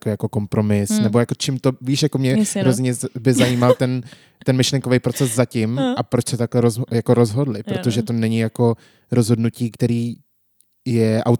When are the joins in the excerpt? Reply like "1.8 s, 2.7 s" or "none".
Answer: none